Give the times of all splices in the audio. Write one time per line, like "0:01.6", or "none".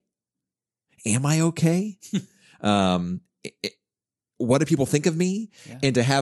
none